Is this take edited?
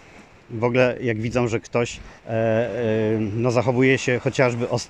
yes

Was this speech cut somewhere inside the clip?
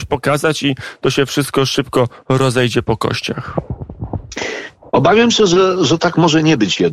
yes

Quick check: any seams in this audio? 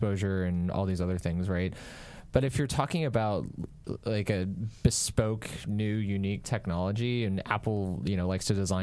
no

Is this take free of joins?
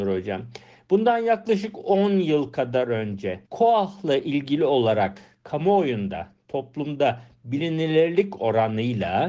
no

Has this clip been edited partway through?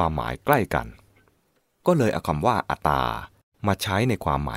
yes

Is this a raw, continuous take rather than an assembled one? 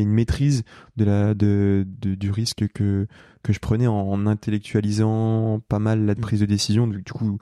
yes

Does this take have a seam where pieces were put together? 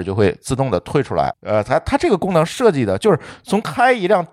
yes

